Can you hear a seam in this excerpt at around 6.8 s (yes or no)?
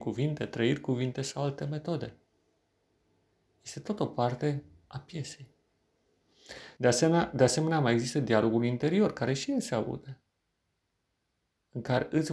yes